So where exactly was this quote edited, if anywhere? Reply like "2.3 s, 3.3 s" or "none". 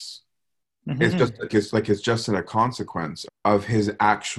1.5 s, 3.3 s